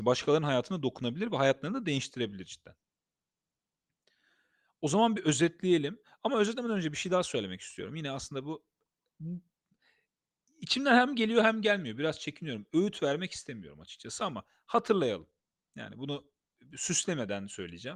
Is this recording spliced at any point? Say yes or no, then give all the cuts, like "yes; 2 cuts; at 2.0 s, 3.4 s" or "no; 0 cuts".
no; 0 cuts